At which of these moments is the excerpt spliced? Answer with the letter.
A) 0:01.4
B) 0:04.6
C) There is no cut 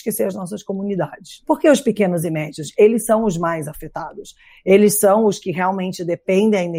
A